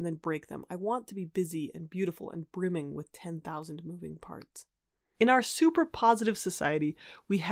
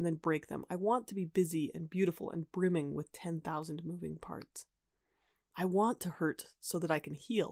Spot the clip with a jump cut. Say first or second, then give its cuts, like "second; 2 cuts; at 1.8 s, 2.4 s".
first; 1 cut; at 5.1 s